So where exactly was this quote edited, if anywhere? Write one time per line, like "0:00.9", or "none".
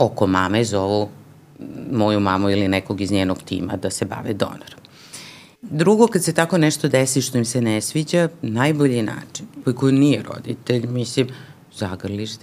0:05.6
0:09.6